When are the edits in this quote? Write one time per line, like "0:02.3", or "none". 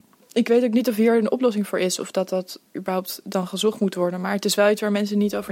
none